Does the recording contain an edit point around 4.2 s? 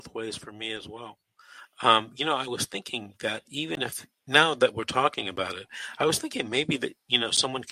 yes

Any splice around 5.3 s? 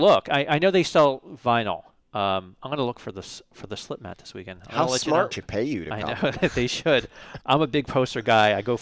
yes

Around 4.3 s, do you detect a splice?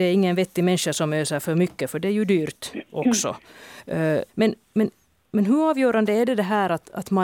yes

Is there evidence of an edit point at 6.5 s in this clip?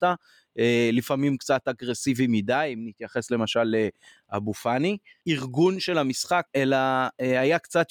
yes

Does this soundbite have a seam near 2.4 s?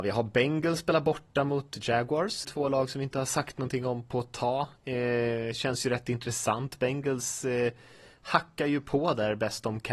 yes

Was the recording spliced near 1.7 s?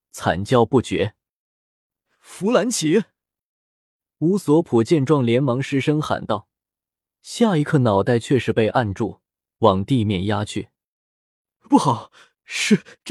no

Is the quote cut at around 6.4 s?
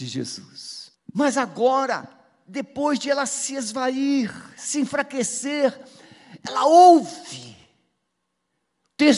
no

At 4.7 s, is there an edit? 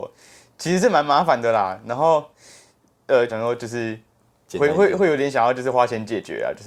no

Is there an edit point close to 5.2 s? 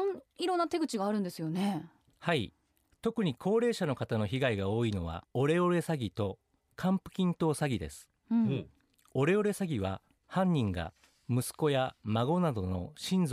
yes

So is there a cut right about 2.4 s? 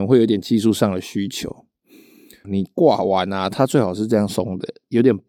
yes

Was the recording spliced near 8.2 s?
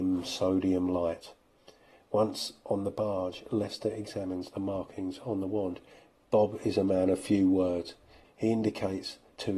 yes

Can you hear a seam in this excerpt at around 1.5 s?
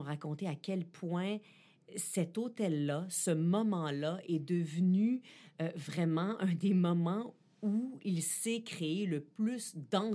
no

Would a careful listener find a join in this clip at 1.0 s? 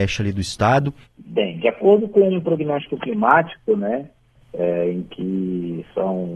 yes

